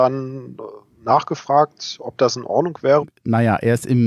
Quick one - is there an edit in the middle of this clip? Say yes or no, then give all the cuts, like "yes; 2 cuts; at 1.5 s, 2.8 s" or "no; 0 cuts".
yes; 1 cut; at 3.0 s